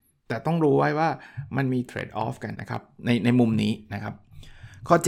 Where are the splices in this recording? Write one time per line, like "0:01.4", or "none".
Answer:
0:02.5